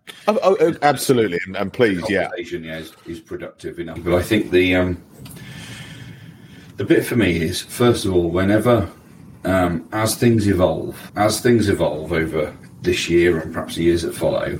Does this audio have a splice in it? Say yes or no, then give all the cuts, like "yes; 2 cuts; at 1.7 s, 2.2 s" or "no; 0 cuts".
yes; 2 cuts; at 4.0 s, 11.1 s